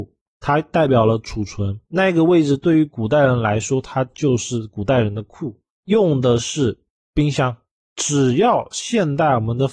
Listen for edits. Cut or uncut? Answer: cut